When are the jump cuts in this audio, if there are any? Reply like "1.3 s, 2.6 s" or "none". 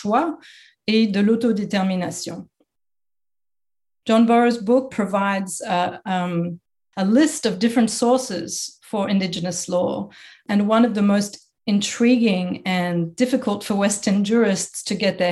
4.9 s